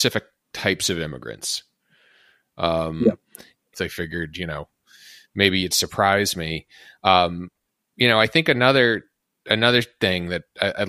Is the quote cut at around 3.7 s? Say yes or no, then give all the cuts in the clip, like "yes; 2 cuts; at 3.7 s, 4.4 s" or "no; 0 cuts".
yes; 1 cut; at 3.7 s